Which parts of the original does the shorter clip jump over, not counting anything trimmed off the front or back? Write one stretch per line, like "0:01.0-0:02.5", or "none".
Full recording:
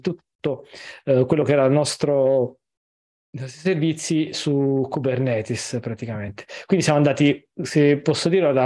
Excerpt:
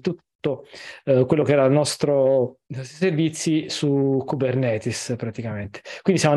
0:02.7-0:03.3